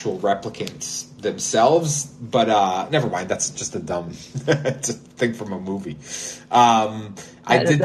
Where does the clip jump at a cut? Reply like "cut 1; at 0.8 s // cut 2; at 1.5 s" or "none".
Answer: none